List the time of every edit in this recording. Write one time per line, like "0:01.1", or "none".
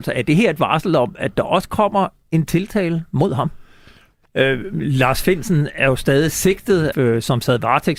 0:04.3
0:06.9